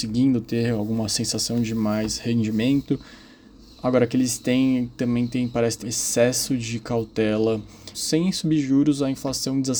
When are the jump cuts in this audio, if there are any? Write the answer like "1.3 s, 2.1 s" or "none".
5.8 s, 7.9 s